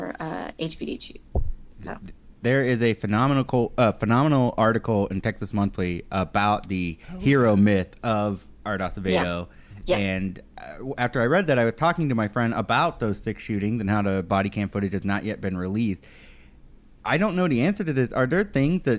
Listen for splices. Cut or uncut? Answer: uncut